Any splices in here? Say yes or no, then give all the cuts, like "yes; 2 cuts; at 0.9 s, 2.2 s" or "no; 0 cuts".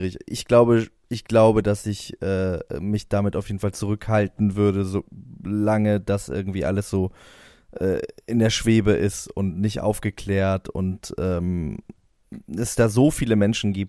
no; 0 cuts